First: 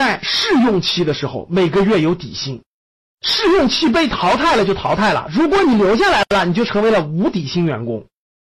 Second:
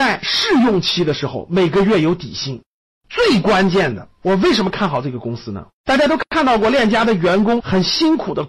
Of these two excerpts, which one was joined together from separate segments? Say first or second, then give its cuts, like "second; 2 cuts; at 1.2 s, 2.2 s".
second; 2 cuts; at 2.9 s, 5.8 s